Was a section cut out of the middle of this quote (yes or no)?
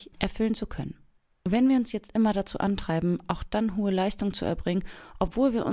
no